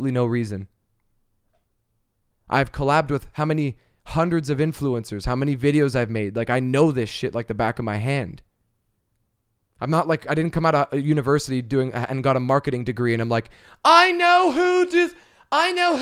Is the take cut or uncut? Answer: cut